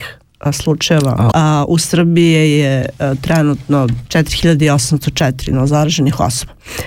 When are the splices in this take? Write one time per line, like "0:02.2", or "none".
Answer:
0:01.3
0:04.1